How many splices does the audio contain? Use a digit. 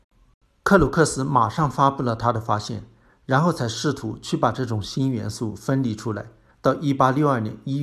1